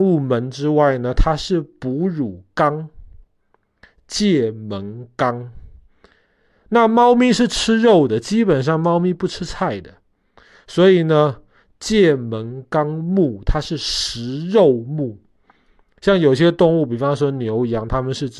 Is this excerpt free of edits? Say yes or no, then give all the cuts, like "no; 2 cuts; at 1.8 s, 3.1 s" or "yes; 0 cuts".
yes; 0 cuts